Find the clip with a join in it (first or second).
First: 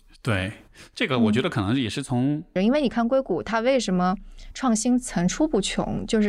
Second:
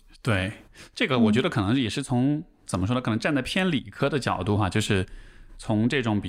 first